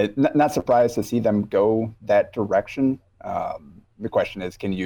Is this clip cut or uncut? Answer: cut